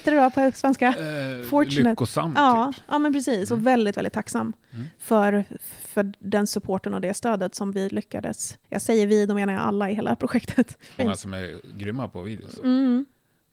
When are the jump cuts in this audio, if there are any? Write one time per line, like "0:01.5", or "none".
0:08.6
0:11.0
0:12.6